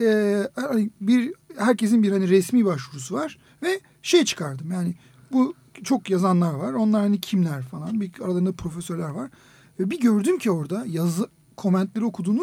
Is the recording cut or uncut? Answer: cut